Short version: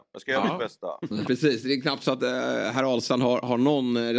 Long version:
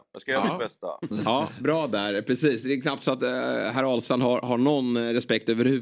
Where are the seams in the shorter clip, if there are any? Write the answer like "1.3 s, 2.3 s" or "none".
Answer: 1.2 s